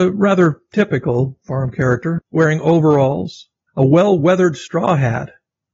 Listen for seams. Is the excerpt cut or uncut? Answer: cut